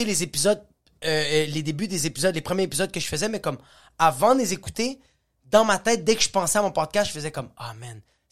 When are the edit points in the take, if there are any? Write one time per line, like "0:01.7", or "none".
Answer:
none